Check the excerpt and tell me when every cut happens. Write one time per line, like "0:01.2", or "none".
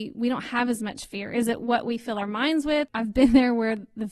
0:02.9